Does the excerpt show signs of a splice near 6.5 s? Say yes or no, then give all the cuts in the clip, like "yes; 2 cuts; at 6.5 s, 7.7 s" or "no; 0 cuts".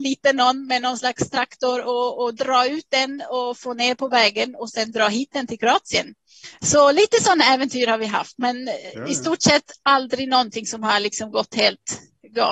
yes; 1 cut; at 6.5 s